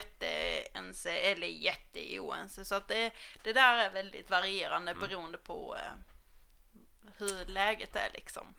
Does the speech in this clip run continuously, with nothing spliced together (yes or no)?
yes